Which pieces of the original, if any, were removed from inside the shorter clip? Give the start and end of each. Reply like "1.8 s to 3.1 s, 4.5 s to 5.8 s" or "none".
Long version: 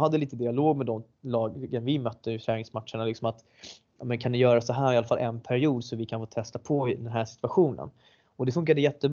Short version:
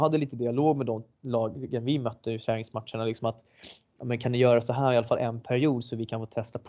none